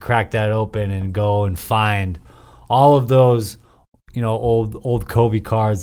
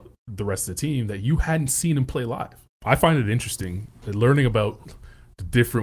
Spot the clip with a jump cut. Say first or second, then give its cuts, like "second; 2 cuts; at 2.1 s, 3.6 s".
second; 1 cut; at 2.7 s